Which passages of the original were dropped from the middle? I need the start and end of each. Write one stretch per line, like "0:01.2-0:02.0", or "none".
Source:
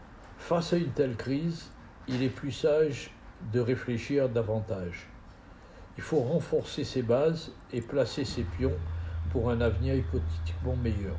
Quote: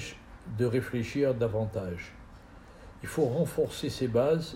none

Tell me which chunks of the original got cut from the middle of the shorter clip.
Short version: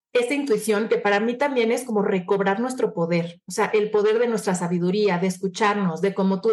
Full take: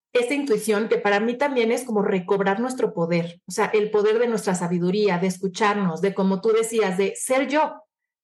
none

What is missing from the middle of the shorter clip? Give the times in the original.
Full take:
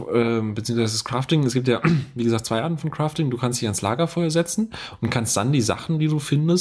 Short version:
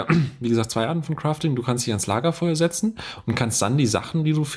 none

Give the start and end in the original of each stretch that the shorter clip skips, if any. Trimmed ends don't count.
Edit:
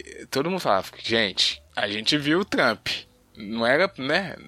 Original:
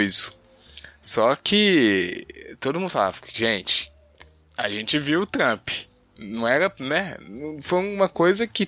0:04.0-0:04.5

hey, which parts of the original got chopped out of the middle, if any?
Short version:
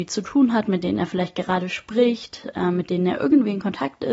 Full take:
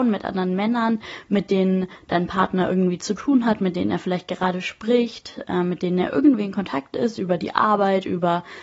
none

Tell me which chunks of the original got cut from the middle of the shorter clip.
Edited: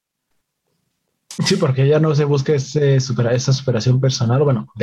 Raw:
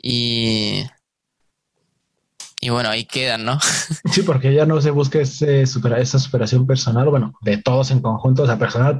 0:02.5-0:04.0

